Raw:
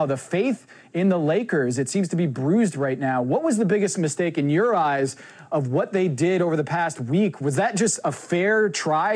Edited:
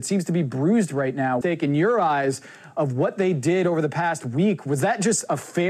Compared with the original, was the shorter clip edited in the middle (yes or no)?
yes